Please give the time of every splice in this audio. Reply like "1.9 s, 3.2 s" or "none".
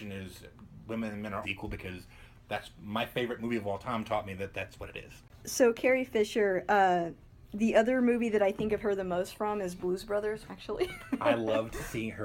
1.4 s, 10.5 s